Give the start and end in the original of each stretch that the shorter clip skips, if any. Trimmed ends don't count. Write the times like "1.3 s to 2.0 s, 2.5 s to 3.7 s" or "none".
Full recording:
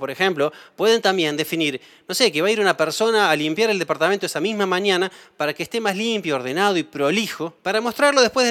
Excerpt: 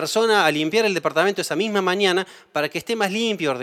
none